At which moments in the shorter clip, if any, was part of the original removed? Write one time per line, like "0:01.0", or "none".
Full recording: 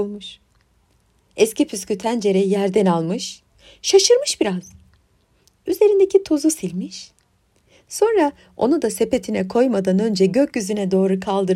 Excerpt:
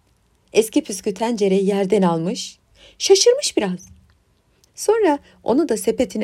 0:04.7